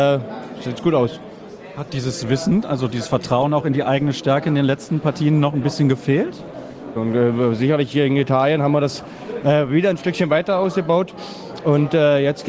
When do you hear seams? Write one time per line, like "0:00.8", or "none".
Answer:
0:07.0